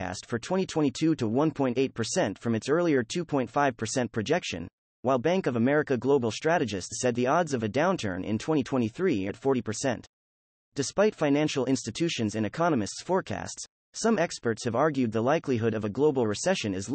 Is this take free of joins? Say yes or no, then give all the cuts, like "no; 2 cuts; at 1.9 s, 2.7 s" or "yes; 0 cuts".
no; 1 cut; at 9.3 s